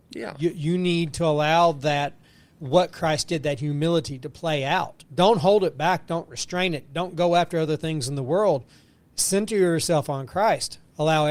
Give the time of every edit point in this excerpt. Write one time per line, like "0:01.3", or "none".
0:05.1